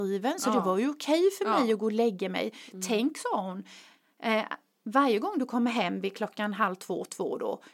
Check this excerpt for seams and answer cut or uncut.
uncut